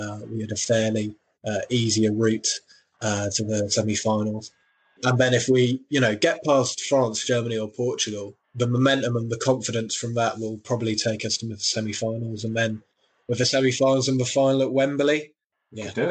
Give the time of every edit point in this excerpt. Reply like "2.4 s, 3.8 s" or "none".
8.4 s